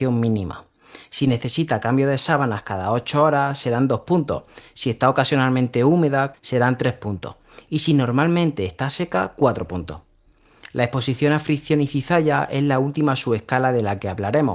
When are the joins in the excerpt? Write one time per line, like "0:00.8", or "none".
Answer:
0:06.3

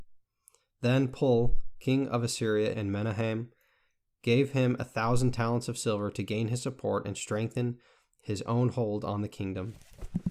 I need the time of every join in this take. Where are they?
0:02.7

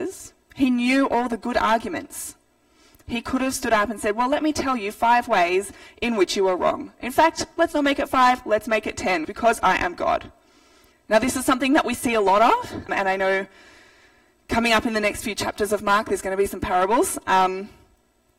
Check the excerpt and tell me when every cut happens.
0:09.2
0:10.9
0:12.9

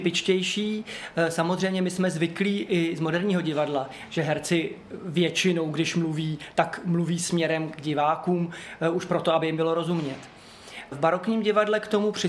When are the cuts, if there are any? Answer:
none

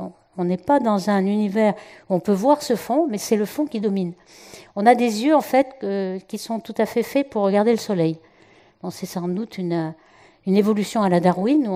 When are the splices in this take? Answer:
none

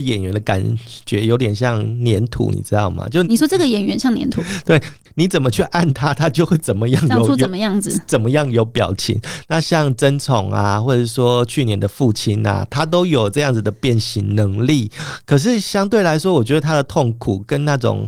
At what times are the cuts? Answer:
0:03.2

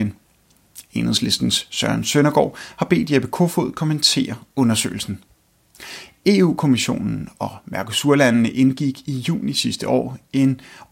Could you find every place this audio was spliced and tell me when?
none

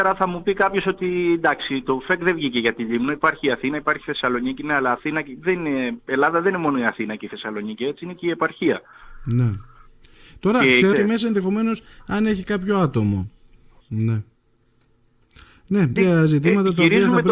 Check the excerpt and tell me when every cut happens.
0:10.9
0:13.8
0:16.0

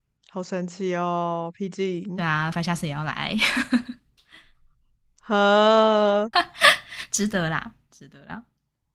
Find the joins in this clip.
0:02.5
0:06.3

